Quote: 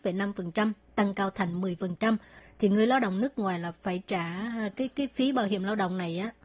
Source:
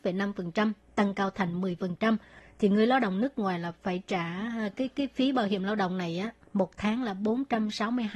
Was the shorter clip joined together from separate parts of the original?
no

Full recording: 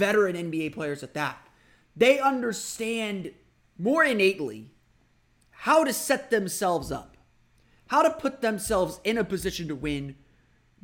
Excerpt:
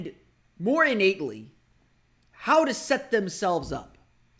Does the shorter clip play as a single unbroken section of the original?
yes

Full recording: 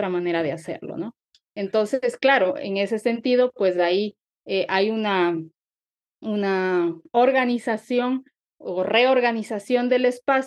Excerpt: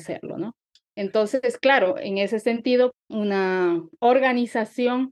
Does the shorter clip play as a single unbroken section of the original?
no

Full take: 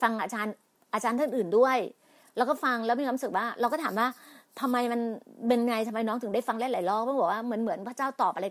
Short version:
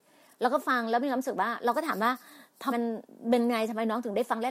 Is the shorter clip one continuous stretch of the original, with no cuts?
no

